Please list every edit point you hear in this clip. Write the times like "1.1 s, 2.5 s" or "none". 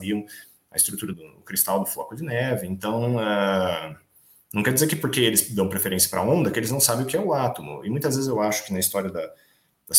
1.1 s